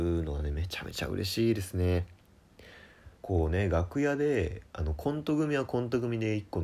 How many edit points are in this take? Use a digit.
2